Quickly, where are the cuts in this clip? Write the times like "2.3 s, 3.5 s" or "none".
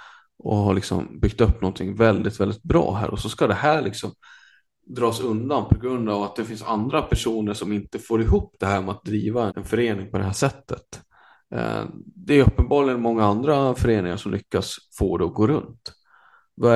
9.5 s